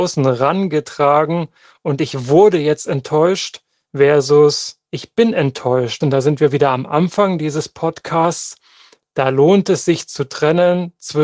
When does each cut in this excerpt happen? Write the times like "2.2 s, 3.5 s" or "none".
6.0 s

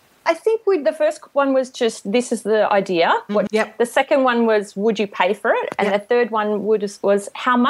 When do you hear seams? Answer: 3.5 s

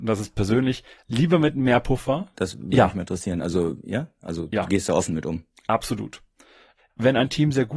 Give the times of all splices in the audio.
2.3 s, 6.8 s

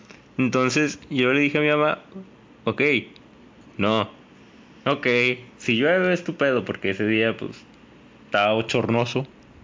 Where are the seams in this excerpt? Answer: 3.6 s

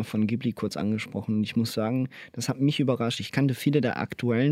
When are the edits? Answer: none

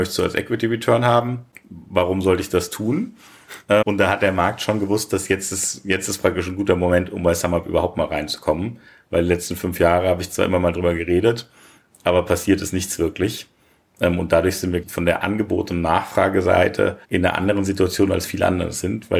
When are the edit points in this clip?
3.8 s, 14.8 s, 17.0 s

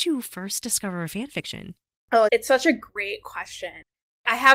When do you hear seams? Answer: 2.3 s

